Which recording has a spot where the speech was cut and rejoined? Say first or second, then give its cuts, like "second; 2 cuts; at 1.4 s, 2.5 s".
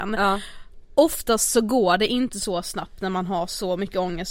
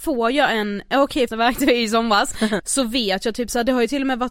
second; 2 cuts; at 1.3 s, 2.6 s